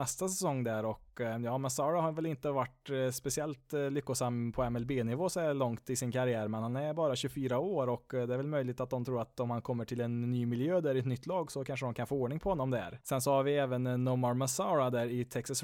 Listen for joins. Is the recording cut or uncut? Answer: cut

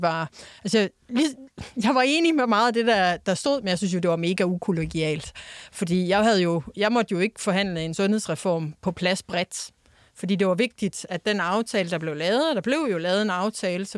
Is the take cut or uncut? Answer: uncut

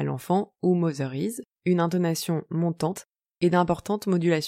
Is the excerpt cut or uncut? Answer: cut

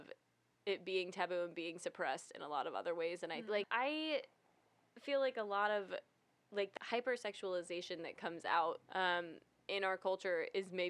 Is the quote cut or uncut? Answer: cut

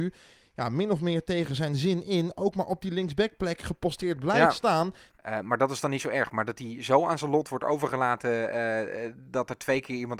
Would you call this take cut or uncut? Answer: cut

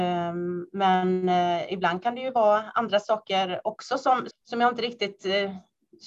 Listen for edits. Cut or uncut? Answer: cut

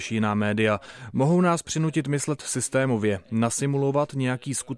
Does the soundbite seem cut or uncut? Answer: uncut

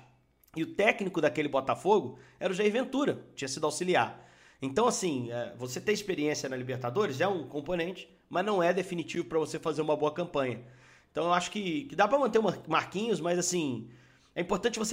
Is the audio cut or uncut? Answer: cut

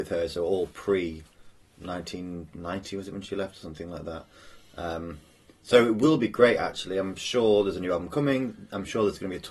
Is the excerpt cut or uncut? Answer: uncut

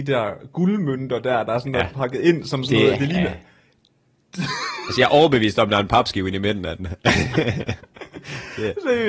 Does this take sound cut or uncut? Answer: uncut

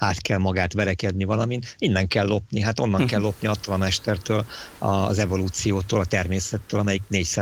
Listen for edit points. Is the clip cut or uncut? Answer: uncut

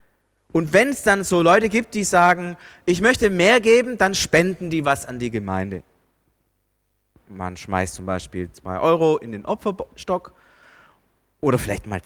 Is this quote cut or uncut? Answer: uncut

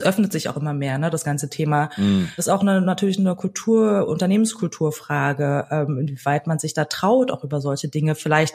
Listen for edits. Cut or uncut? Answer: cut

